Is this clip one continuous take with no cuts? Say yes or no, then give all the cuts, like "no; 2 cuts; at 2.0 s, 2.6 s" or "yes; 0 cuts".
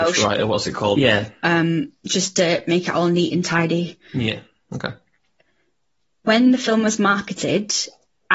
no; 1 cut; at 1.0 s